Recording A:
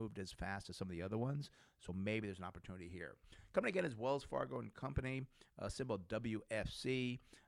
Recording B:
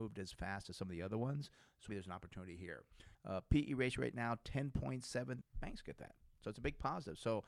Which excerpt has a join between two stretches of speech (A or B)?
B